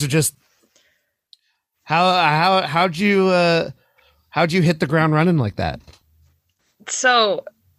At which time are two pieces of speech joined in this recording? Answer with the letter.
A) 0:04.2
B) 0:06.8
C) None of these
C